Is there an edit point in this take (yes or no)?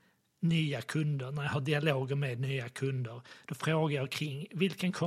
no